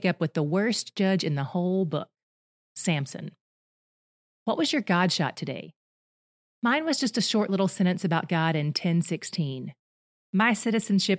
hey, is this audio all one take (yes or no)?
no